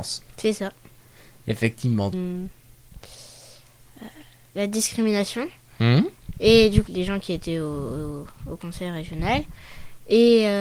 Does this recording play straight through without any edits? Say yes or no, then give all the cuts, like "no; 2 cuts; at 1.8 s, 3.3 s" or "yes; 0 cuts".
no; 2 cuts; at 2.1 s, 6.9 s